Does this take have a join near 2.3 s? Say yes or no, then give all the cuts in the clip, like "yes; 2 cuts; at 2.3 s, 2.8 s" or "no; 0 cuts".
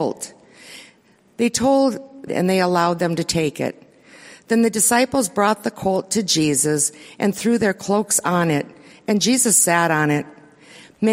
yes; 1 cut; at 2.3 s